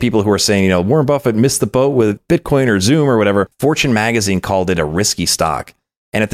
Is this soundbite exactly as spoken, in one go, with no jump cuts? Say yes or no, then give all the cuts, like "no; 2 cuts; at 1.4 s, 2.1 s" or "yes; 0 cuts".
no; 1 cut; at 3.5 s